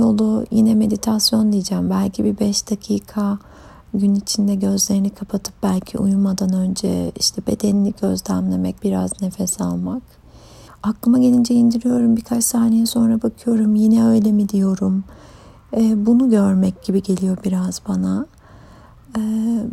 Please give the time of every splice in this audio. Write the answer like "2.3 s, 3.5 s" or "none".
8.8 s, 10.7 s